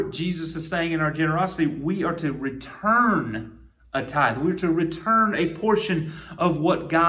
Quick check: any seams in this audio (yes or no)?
no